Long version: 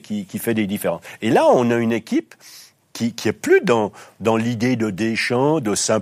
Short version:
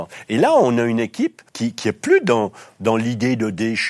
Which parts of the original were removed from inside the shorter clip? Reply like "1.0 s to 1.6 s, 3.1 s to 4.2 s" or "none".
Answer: 2.4 s to 2.9 s

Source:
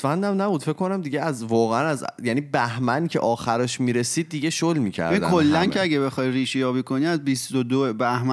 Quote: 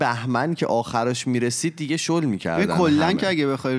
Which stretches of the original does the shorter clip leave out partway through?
none

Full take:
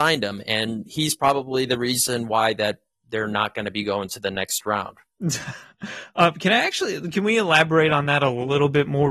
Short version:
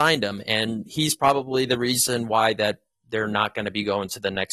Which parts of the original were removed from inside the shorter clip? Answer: none

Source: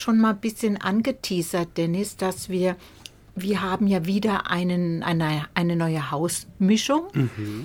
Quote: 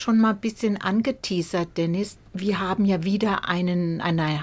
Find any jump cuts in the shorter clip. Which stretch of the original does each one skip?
2.2 s to 3.2 s

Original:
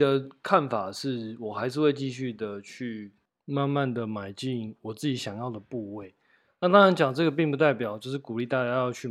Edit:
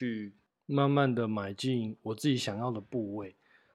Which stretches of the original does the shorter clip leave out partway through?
none

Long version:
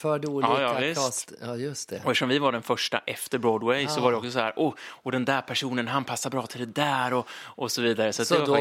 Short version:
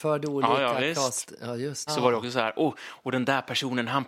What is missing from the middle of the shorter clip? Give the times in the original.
1.9 s to 3.9 s

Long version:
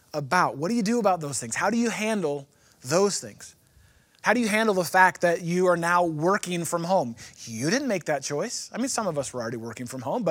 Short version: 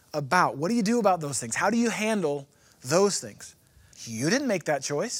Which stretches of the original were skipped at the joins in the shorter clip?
3.9 s to 7.3 s

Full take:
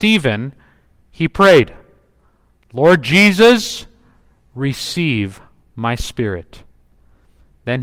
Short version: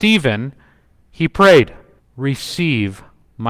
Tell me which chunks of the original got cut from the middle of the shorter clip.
2.0 s to 4.4 s

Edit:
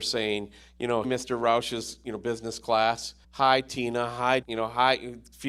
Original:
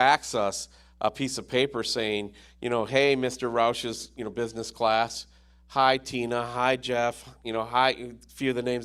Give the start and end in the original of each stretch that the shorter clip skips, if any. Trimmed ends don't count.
2.9 s to 3.2 s, 5.4 s to 5.6 s, 6.8 s to 7.4 s

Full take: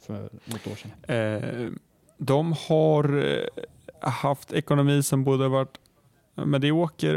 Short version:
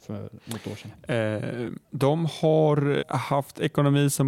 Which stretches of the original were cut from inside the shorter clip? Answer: 1.8 s to 2.1 s, 3.3 s to 3.9 s

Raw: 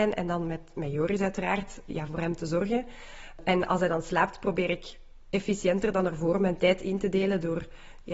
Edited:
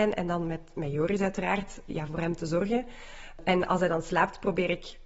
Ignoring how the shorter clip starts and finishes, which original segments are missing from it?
none

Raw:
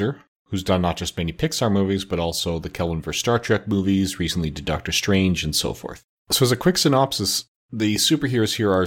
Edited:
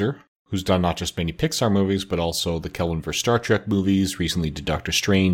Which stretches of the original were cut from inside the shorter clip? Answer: none

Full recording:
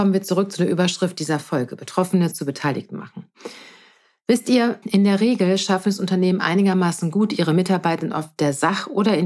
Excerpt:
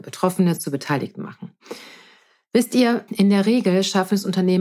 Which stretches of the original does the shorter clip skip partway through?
none

